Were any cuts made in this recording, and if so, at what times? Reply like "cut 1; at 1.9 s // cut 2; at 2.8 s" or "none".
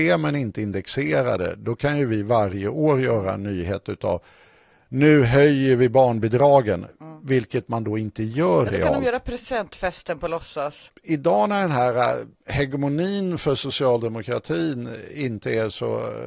cut 1; at 10.9 s // cut 2; at 12.4 s